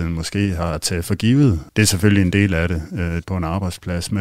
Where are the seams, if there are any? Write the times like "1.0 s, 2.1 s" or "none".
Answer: 1.7 s, 3.2 s